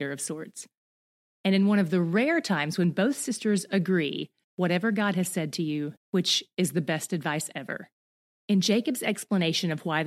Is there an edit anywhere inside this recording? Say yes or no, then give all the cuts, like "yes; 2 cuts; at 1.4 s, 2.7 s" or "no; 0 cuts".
yes; 2 cuts; at 4.4 s, 6.0 s